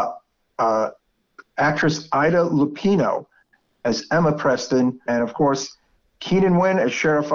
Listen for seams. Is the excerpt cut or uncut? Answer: cut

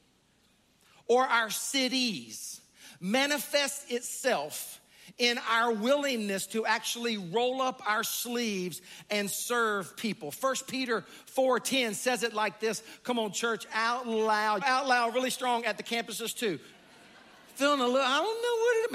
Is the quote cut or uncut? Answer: cut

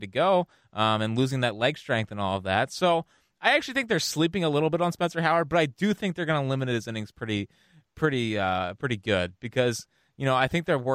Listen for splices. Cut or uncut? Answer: uncut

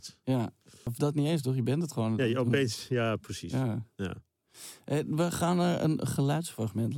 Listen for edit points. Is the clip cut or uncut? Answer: uncut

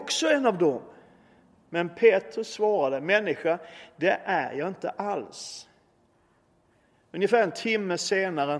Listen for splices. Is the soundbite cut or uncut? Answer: uncut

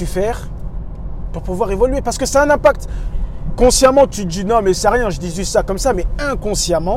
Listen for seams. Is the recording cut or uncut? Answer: uncut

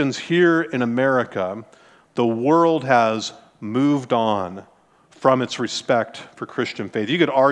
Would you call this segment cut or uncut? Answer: uncut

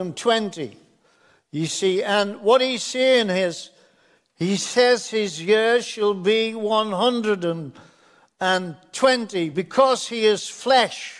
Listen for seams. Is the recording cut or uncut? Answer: uncut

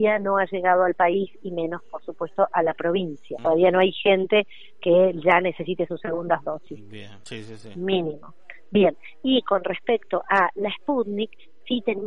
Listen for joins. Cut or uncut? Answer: cut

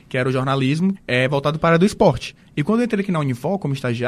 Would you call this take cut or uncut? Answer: cut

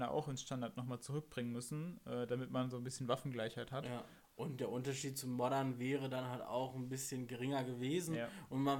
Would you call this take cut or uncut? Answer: cut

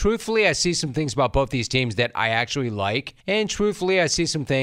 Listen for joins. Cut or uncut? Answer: cut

